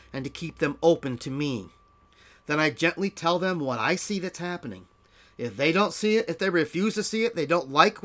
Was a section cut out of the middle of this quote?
no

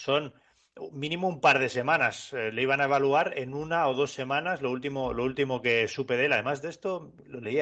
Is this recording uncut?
yes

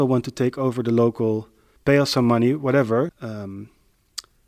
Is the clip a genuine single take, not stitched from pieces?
no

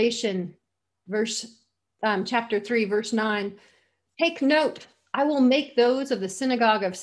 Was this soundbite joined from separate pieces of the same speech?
no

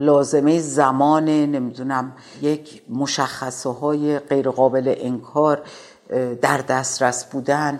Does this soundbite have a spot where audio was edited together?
no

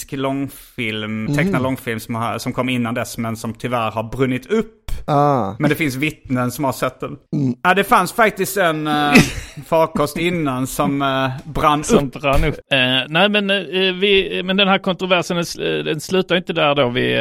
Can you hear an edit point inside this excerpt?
yes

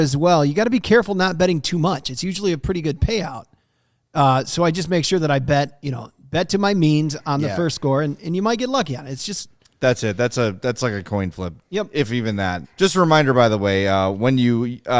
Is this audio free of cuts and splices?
no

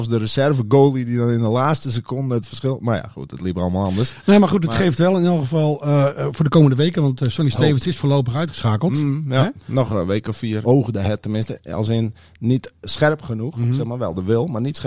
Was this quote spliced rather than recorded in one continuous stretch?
yes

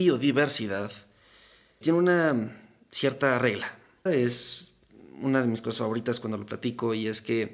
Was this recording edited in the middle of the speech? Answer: yes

